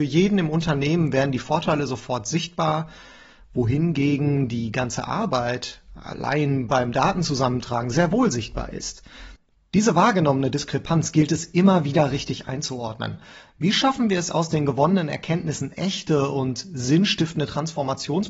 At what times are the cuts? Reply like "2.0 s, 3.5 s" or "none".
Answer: 13.5 s